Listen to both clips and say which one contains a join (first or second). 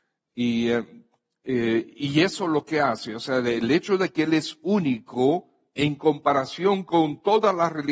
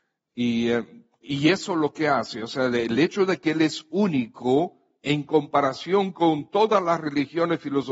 second